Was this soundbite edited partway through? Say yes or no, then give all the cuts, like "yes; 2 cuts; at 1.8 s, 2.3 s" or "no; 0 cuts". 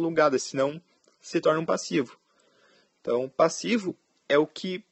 no; 0 cuts